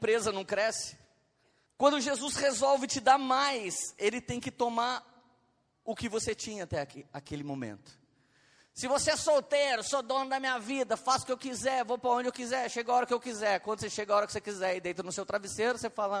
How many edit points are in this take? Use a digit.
1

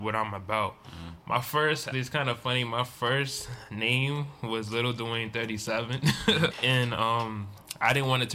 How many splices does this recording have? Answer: 2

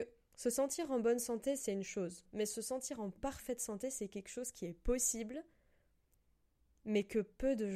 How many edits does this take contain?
1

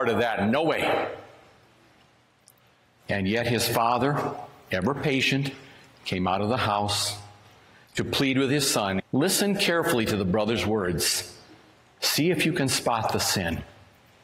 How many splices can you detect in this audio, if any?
1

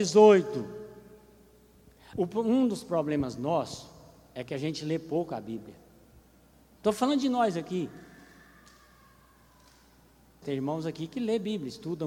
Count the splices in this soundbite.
3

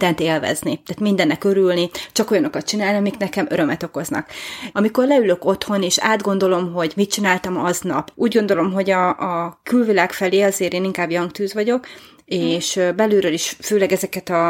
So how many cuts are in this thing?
2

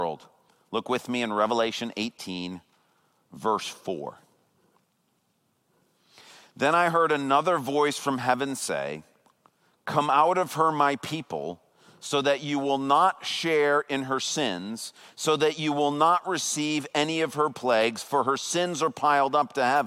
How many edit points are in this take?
0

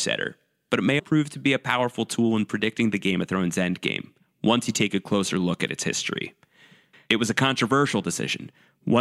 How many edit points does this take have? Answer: 2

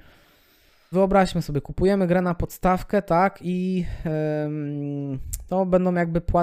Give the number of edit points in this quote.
1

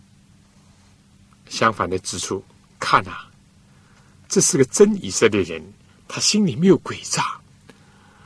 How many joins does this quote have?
0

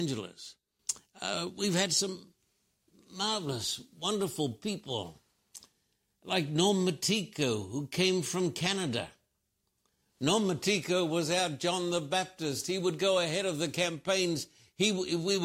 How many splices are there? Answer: 0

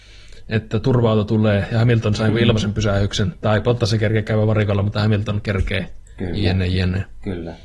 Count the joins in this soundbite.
0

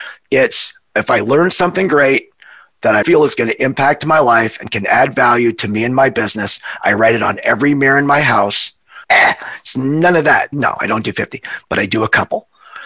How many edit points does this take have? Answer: 3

